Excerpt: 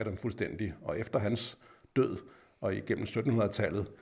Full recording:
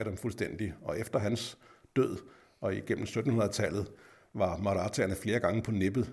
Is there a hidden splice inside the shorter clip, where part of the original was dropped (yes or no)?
no